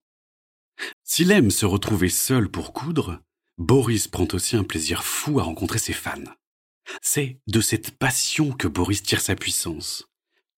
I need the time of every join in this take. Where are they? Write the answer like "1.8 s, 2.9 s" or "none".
0.9 s, 7.0 s